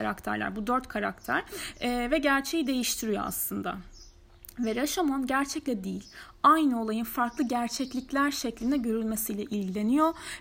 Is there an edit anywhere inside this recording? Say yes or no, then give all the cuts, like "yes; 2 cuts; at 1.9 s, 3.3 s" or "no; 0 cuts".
no; 0 cuts